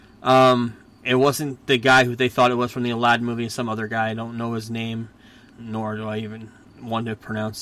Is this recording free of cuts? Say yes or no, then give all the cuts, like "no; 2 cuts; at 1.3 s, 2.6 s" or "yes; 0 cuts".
no; 1 cut; at 5.5 s